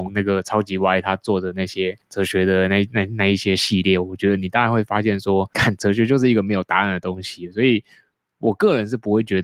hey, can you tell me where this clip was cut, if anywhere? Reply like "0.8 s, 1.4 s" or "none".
none